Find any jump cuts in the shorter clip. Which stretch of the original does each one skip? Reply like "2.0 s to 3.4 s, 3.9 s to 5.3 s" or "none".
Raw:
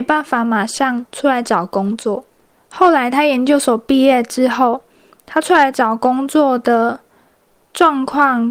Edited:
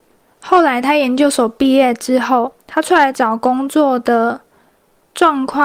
4.9 s to 5.2 s